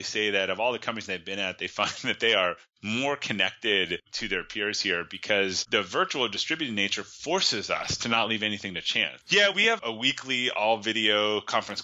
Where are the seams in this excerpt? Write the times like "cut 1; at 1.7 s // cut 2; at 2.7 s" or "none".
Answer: cut 1; at 9.2 s